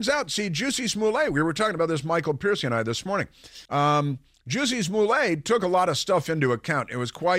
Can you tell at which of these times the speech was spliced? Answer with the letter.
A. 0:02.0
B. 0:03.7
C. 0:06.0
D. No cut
B